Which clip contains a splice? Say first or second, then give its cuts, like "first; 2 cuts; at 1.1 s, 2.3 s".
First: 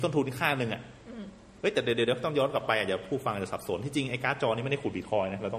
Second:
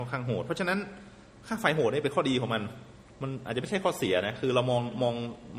second; 1 cut; at 3.1 s